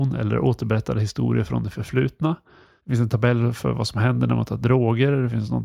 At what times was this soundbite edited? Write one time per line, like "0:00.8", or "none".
none